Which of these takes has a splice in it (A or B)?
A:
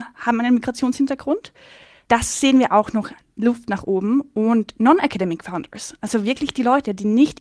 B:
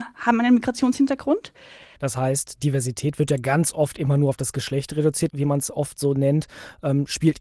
B